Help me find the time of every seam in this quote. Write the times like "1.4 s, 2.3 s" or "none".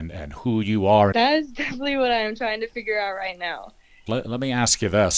1.1 s, 4.1 s